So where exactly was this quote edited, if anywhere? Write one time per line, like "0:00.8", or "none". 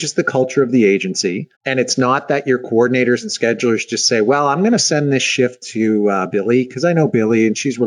0:01.5